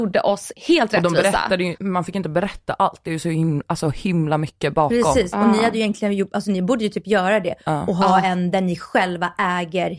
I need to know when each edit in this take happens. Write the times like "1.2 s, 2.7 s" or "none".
1.8 s